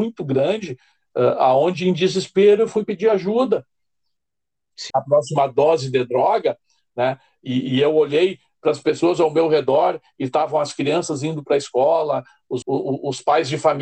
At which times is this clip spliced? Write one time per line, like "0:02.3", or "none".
0:04.9
0:12.6